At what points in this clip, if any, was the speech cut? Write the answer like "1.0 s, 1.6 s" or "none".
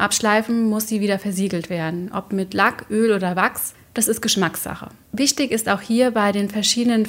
none